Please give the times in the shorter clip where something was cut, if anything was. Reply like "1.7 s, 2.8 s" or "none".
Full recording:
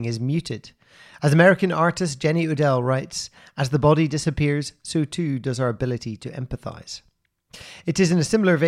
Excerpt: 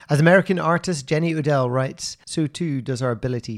2.2 s

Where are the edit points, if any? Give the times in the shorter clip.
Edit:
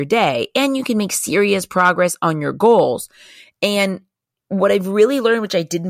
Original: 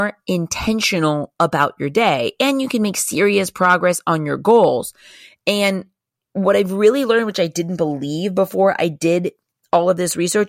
none

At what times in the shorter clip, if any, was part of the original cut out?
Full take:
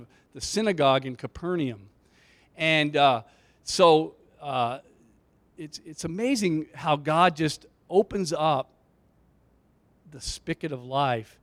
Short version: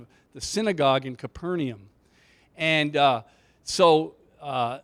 none

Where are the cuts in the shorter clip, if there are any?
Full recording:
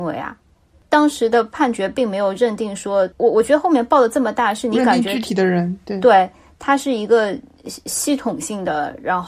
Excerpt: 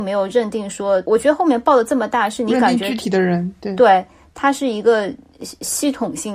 1.1 s

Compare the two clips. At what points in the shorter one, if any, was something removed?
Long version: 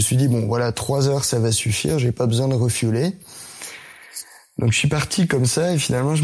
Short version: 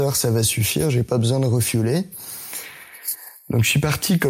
none

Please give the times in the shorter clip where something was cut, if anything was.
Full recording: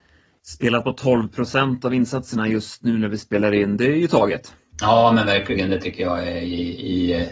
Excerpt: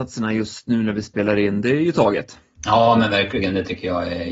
none

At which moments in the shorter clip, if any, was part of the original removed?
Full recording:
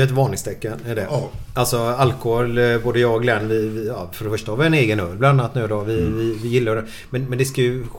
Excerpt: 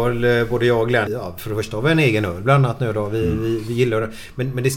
1.1 s

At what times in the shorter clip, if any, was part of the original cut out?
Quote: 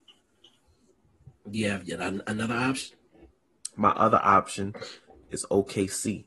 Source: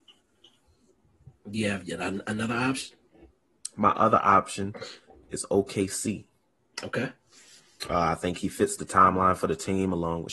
none

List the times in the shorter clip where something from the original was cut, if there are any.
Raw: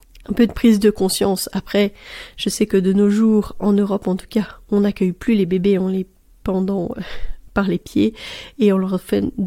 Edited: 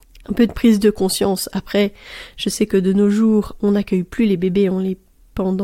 3.5 s

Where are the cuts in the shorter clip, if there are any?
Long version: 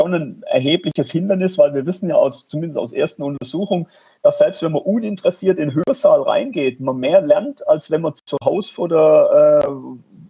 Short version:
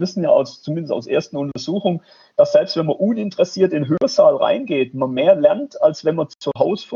none

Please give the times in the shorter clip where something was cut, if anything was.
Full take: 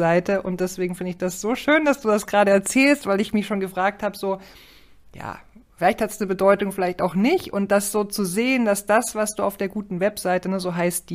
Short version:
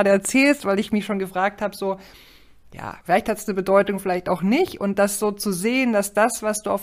3.0 s

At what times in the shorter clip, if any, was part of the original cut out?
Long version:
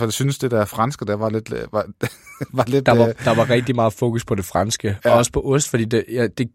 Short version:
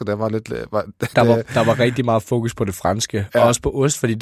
1.1 s

